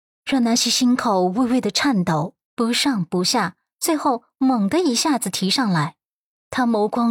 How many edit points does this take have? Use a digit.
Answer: 1